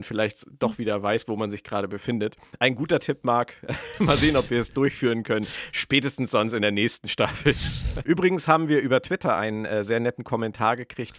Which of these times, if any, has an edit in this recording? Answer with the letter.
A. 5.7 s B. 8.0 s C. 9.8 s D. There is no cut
B